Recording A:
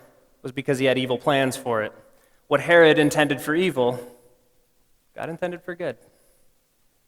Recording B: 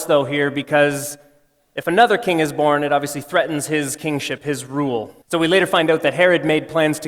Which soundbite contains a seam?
B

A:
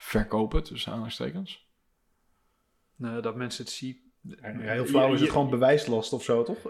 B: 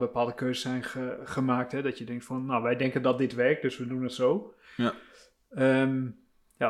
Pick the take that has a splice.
A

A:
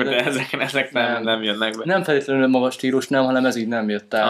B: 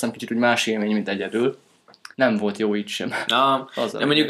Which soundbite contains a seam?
B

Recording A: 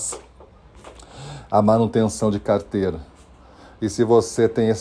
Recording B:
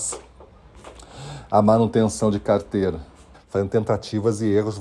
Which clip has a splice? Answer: B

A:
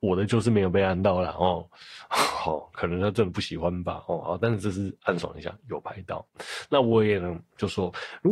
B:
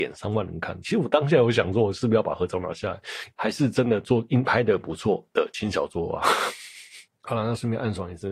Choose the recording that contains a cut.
B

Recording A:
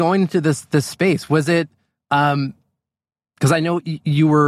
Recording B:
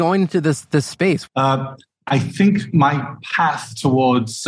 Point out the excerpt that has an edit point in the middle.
B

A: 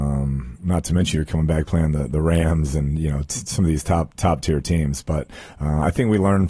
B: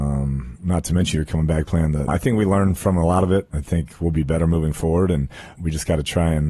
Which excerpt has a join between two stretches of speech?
B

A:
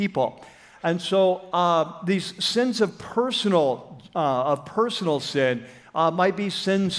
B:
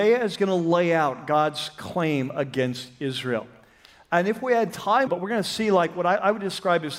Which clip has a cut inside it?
B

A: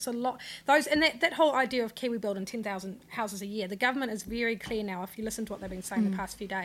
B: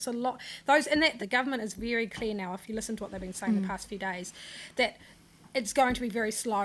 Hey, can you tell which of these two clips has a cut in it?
B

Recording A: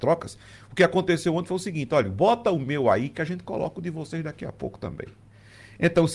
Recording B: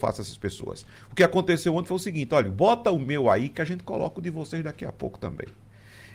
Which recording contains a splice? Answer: B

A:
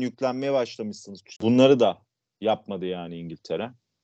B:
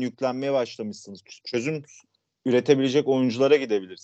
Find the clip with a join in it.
A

